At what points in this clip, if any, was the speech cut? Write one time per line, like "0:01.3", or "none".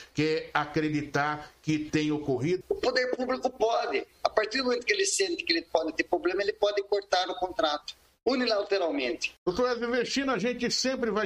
0:02.6
0:09.4